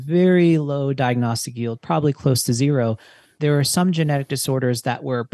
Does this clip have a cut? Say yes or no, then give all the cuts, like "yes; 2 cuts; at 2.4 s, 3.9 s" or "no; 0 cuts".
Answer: yes; 1 cut; at 3.3 s